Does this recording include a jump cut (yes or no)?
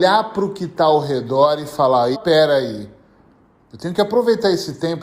yes